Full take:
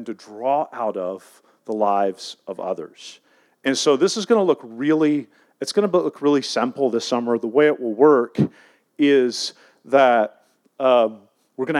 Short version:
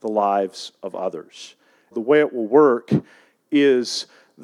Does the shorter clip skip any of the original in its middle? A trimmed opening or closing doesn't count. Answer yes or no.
yes